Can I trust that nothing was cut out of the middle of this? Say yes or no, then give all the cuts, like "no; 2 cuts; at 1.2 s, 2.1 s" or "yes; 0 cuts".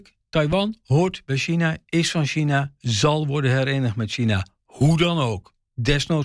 yes; 0 cuts